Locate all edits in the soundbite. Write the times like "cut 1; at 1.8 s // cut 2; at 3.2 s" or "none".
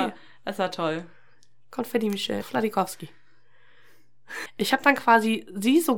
cut 1; at 2.4 s // cut 2; at 4.5 s